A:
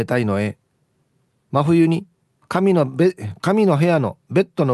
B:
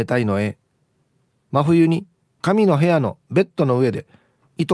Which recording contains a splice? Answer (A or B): B